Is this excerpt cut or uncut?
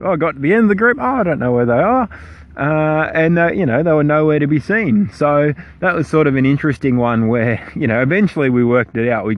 uncut